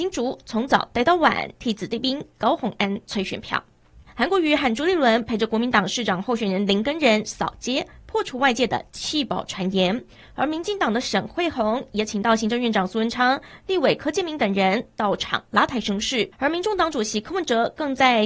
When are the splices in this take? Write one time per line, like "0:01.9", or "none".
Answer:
0:04.1